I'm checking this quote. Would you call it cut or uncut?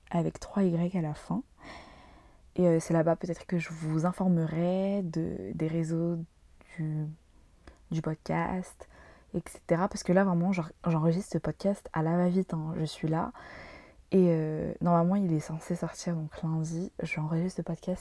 uncut